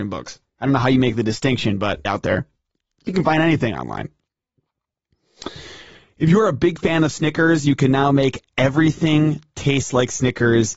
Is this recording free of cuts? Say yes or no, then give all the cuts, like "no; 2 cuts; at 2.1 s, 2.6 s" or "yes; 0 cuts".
no; 1 cut; at 2.0 s